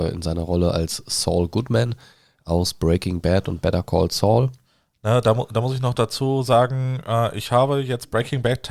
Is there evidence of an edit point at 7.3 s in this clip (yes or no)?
no